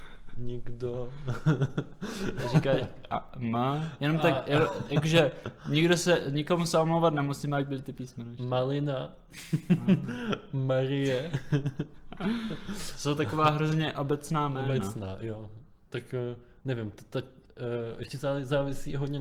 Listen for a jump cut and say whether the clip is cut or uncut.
uncut